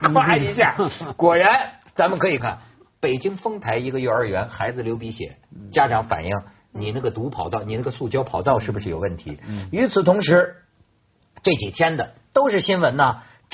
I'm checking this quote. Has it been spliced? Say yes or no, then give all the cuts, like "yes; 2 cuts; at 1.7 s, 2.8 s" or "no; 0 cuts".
yes; 1 cut; at 2.4 s